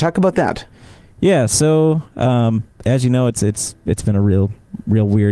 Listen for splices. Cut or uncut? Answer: uncut